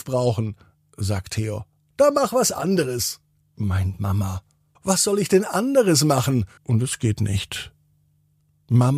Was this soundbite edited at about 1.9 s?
no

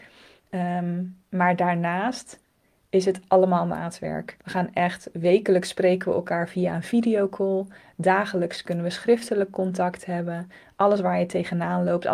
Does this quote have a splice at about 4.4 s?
yes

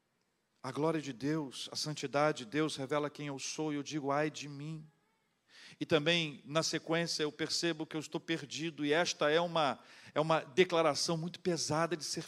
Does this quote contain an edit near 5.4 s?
no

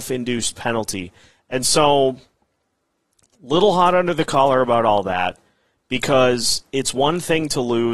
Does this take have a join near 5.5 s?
no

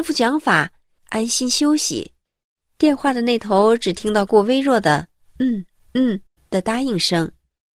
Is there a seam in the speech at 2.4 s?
no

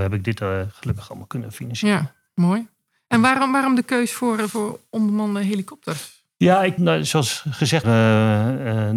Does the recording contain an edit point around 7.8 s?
yes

